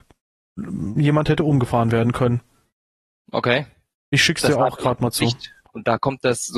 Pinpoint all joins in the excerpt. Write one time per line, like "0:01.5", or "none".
0:05.7